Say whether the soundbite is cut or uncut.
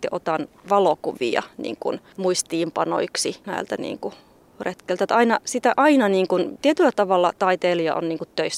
uncut